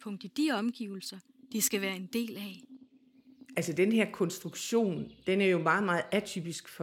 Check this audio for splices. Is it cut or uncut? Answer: uncut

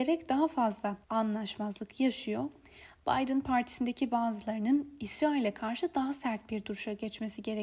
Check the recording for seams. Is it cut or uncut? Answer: cut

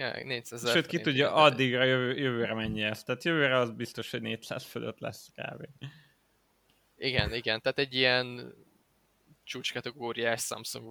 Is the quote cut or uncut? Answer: uncut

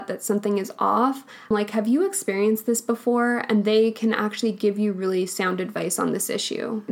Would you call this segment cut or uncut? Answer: cut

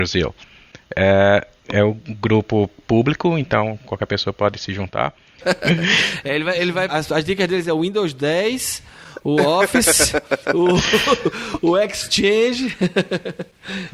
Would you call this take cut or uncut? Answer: cut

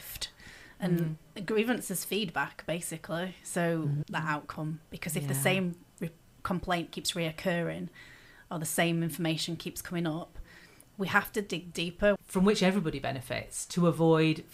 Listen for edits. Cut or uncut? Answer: cut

